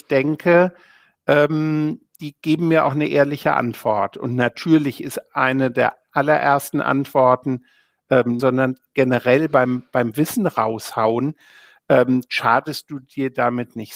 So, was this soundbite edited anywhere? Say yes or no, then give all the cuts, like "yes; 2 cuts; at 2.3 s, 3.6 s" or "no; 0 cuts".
yes; 1 cut; at 8.4 s